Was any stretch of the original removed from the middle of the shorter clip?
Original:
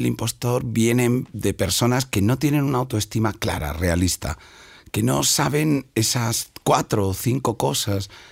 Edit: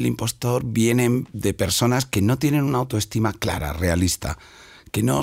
no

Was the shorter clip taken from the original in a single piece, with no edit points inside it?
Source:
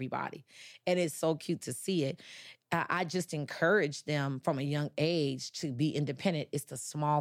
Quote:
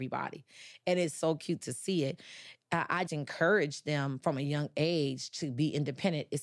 no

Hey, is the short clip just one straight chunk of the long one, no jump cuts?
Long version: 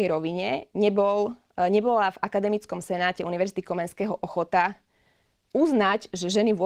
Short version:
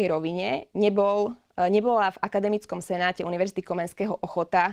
yes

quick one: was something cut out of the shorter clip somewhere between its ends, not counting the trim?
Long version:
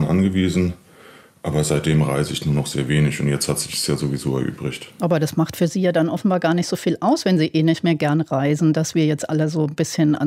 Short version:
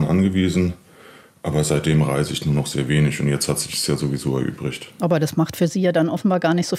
no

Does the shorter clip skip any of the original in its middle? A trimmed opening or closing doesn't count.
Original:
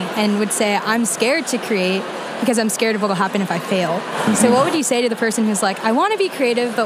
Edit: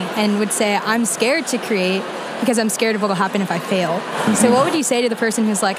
no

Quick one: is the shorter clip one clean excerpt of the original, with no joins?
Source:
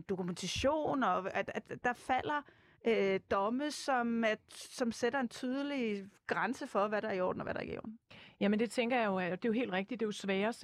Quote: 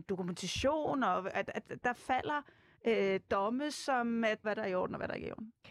no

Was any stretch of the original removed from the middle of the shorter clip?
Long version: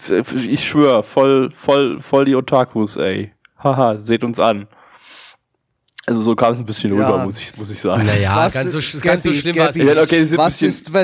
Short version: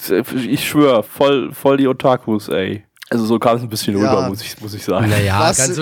yes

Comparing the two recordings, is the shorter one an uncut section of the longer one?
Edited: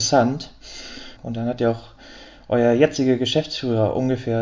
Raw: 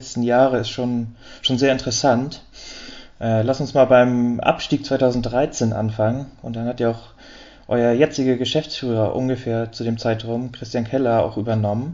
no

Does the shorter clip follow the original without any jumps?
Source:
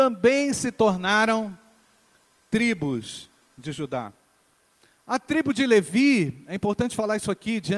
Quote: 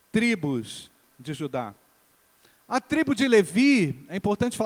yes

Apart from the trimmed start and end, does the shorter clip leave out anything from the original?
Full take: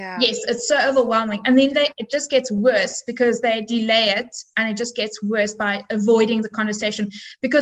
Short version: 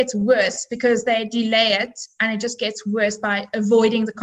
no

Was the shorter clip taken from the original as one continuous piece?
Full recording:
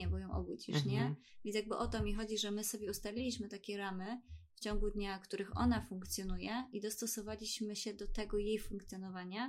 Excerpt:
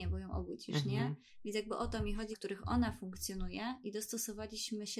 no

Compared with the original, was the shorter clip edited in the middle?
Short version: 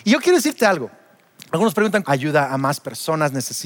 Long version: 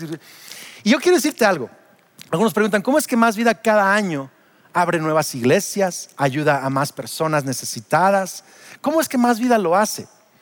yes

